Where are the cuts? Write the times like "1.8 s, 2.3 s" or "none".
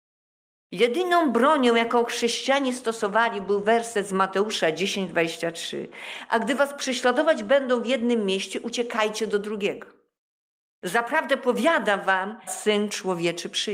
12.5 s